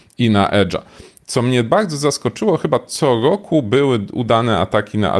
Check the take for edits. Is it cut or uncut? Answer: uncut